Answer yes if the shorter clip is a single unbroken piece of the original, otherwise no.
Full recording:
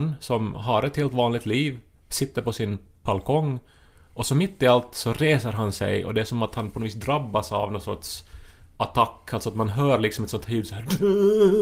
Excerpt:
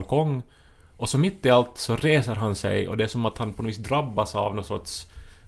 yes